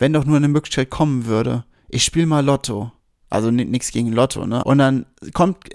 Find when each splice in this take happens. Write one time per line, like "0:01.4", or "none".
0:04.6